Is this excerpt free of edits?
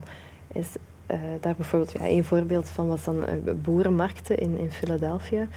yes; 0 cuts

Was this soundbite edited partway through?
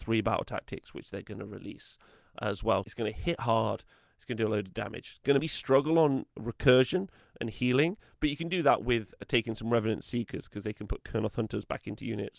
yes; 2 cuts; at 2.8 s, 5.4 s

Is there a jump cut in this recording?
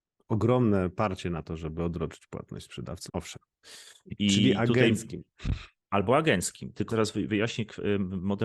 yes; 2 cuts; at 3.1 s, 6.9 s

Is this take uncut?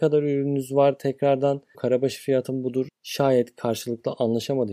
no; 2 cuts; at 1.7 s, 2.9 s

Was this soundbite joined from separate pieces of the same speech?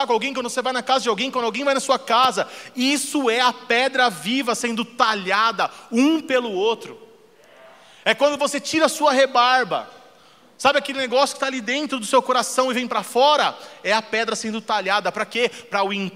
no; 0 cuts

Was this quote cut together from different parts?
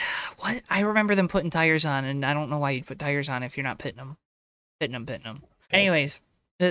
yes; 1 cut; at 5.7 s

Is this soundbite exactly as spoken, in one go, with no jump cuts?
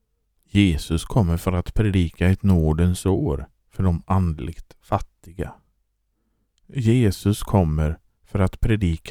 yes; 0 cuts

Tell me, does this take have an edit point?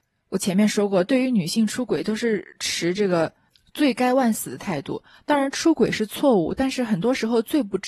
no; 0 cuts

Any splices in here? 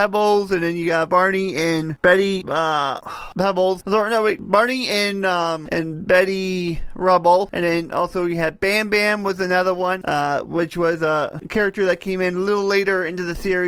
no; 0 cuts

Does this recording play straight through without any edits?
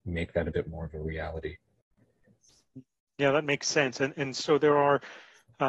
yes; 0 cuts

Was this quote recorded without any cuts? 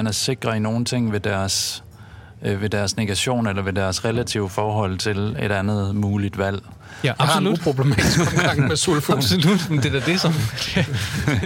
no; 1 cut; at 7.2 s

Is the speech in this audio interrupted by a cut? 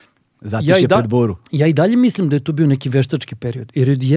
yes; 1 cut; at 1.5 s

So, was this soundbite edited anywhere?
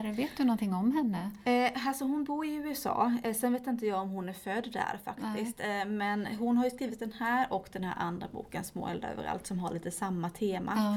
no; 0 cuts

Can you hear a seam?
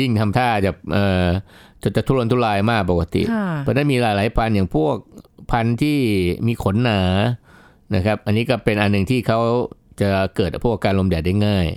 no; 0 cuts

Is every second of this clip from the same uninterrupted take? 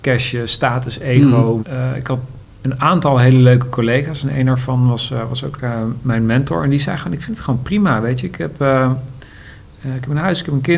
no; 1 cut; at 1.6 s

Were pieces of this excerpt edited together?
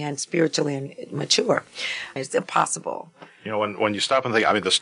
yes; 1 cut; at 2.2 s

